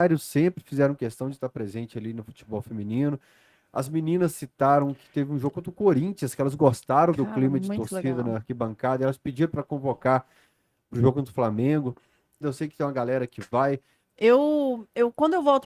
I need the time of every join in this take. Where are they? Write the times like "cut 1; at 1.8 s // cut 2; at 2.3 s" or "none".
cut 1; at 12.4 s // cut 2; at 14.0 s

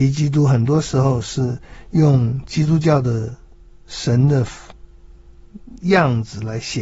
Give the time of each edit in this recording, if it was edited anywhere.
none

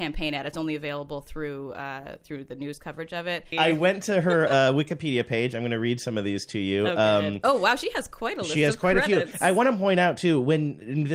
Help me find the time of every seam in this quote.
cut 1; at 3.5 s

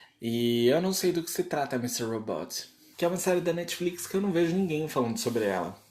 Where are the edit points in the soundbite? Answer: cut 1; at 2.9 s

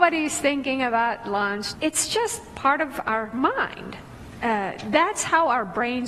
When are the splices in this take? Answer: cut 1; at 1.7 s

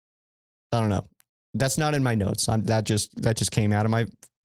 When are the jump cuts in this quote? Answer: none

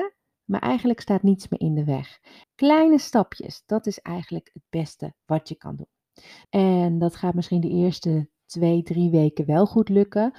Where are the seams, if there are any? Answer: cut 1; at 2.4 s // cut 2; at 6.4 s

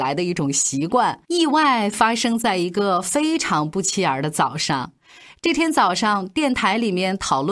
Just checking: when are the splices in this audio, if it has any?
cut 1; at 1.2 s

